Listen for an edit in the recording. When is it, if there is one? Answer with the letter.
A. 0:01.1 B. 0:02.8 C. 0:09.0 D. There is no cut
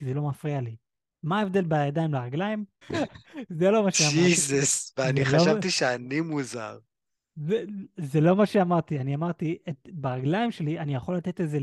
B